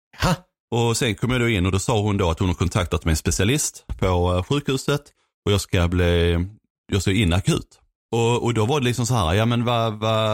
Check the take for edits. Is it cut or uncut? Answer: cut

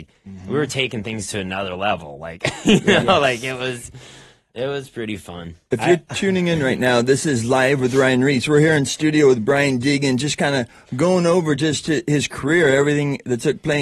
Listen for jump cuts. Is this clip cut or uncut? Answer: uncut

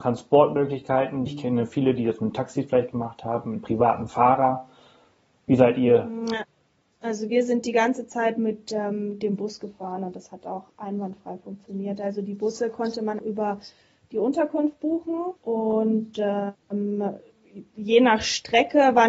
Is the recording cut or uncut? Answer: cut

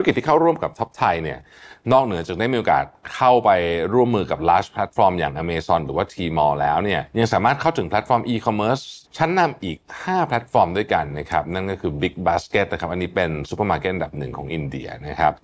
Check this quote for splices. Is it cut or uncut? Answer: cut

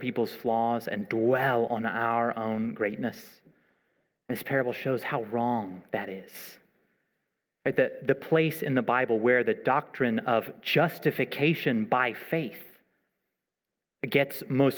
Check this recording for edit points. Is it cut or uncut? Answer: uncut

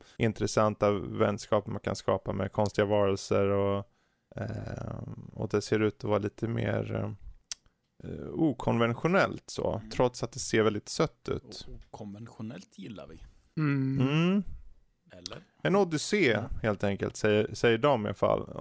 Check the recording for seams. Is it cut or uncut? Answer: uncut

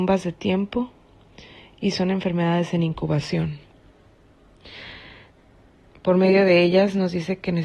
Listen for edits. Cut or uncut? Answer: cut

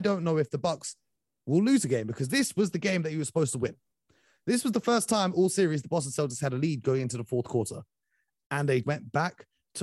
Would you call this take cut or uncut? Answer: cut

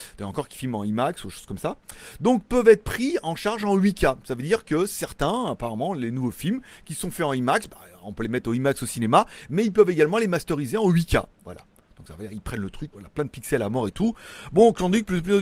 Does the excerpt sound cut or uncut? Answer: cut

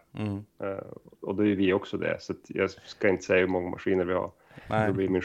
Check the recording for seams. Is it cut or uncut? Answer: uncut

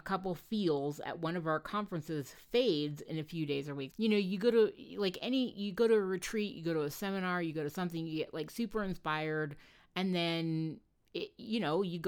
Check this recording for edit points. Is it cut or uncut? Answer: cut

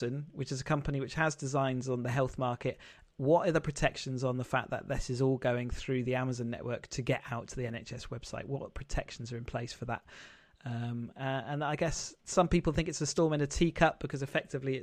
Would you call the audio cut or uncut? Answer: uncut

